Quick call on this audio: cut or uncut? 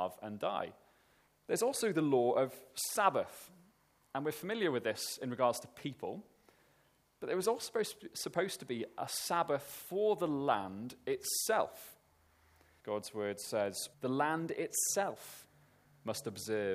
cut